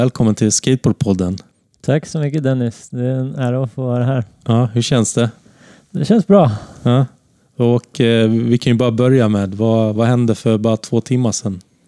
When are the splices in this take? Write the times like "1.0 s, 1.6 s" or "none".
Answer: none